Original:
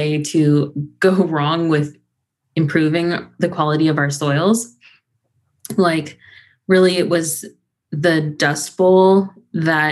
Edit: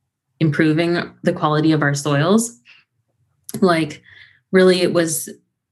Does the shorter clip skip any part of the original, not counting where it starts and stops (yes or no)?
no